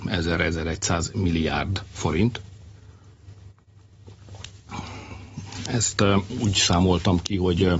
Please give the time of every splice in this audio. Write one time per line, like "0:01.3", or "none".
none